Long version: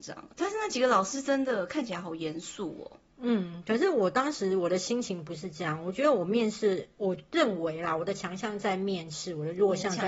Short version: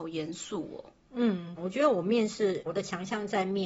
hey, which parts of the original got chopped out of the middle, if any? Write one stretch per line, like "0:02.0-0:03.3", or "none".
0:03.6-0:05.8
0:06.9-0:08.0